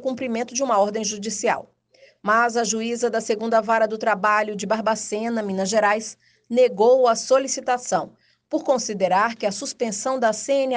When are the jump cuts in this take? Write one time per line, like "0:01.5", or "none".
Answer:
none